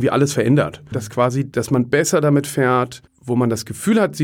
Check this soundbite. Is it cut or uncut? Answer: cut